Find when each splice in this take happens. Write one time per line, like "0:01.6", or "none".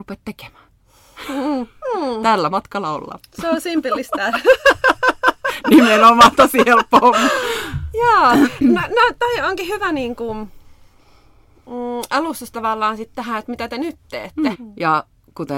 0:14.5